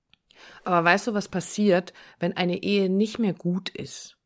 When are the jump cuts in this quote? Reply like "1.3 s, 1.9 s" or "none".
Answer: none